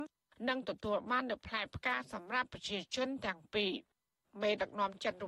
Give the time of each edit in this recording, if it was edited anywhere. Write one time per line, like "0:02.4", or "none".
none